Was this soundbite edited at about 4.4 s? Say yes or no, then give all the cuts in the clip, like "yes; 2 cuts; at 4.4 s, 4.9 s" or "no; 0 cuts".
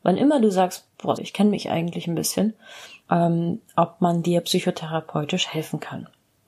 no; 2 cuts; at 1.2 s, 3.0 s